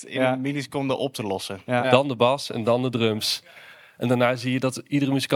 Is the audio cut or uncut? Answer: cut